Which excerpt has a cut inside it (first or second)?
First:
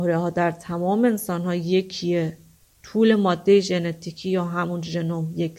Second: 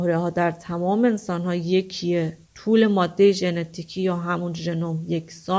second